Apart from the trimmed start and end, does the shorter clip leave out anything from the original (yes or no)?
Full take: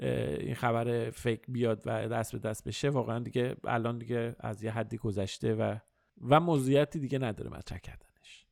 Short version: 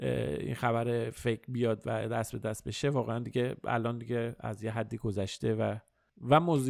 no